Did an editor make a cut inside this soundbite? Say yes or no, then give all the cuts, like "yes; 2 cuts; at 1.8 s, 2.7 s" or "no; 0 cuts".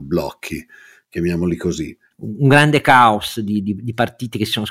yes; 1 cut; at 2.1 s